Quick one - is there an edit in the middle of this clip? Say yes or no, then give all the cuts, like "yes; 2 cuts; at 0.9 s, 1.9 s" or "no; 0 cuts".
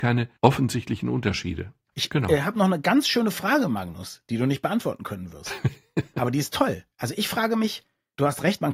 yes; 2 cuts; at 1.9 s, 6.9 s